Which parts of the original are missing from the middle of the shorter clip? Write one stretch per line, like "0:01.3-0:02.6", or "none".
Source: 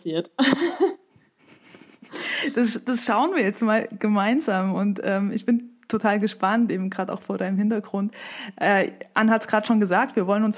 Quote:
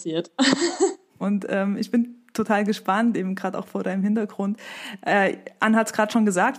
0:01.2-0:04.7